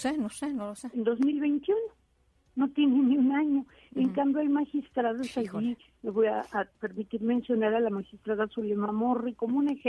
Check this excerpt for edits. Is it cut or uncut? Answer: uncut